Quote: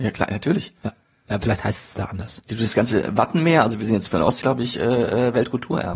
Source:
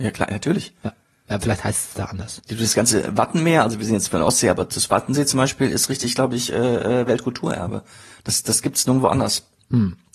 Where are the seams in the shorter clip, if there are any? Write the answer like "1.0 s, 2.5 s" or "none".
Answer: 4.4 s